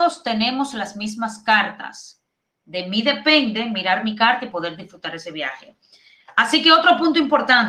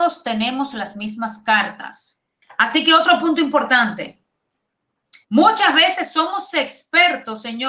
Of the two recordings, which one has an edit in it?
second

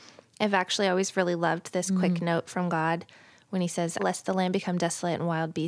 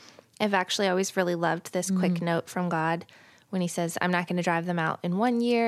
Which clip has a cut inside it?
first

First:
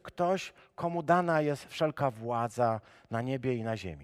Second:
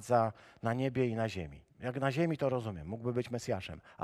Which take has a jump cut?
second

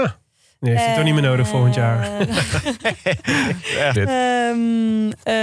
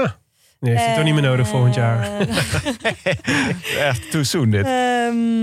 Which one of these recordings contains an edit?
first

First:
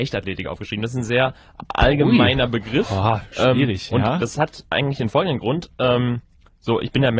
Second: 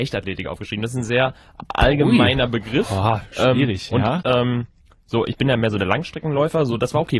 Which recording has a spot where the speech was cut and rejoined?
second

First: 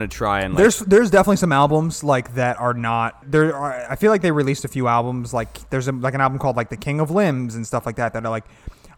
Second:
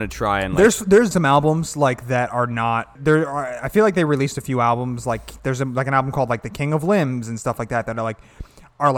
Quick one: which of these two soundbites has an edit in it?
second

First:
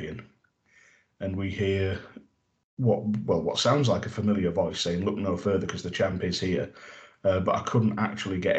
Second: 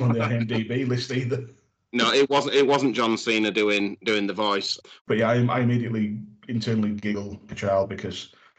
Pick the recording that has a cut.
second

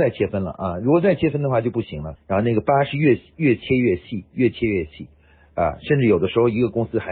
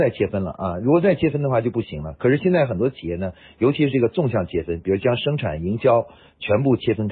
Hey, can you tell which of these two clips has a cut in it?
first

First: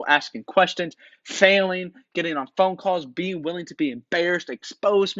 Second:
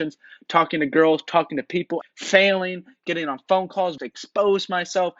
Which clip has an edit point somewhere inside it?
second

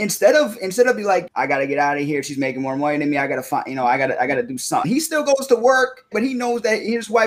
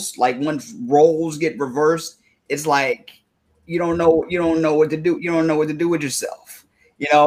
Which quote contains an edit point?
first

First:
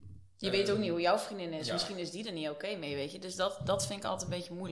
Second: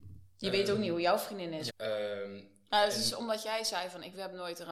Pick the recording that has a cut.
second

